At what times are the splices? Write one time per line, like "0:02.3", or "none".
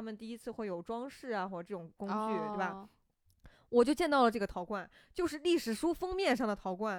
none